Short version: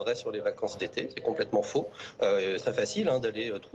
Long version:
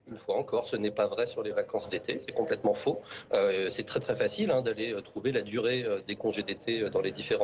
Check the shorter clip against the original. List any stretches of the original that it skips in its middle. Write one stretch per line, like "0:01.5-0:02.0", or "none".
0:03.7-0:04.0